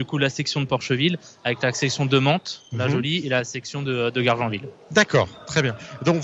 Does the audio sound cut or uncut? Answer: uncut